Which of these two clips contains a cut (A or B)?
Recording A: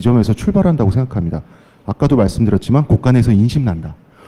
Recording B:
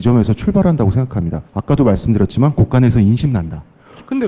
B